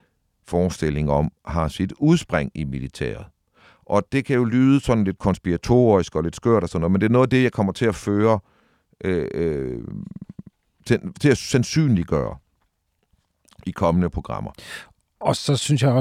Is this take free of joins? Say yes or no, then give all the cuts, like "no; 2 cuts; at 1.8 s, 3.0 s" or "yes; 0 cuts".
yes; 0 cuts